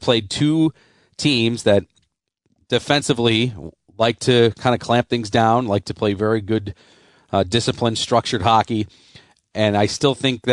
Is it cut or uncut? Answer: uncut